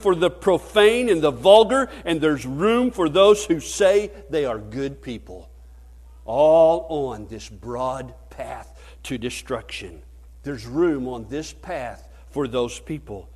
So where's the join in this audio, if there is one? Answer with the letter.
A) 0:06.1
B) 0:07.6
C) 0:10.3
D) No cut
C